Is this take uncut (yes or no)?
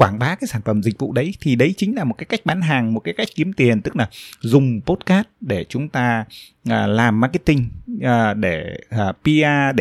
yes